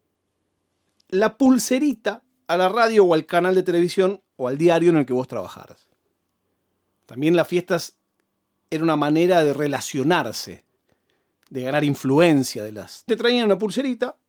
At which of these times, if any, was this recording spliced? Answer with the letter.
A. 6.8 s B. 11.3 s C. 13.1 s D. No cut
C